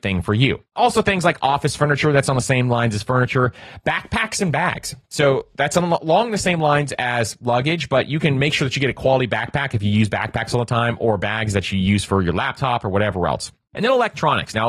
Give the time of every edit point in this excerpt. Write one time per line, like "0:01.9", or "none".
none